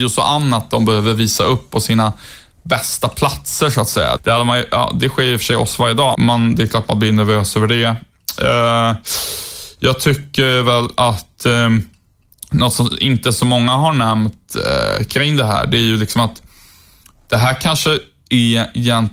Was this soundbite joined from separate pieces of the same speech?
yes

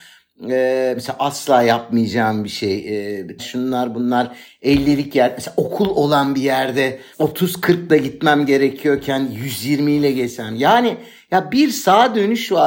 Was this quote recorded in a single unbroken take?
no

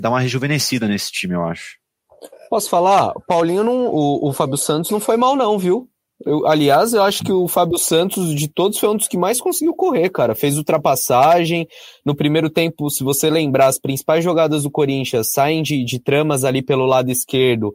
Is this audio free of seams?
yes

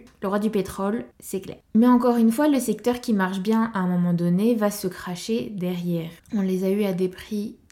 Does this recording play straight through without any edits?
no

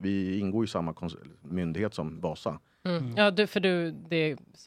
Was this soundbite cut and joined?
no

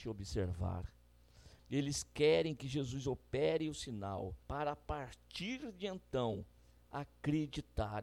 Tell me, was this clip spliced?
yes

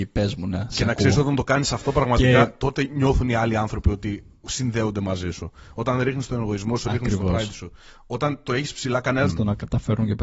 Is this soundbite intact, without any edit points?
no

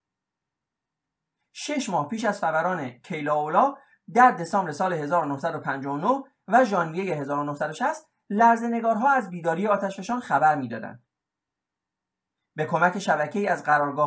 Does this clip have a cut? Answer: no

